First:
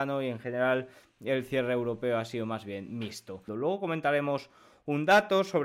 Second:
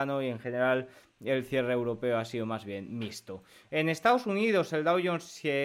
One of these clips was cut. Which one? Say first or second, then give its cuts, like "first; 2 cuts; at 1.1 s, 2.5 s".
first; 1 cut; at 3.5 s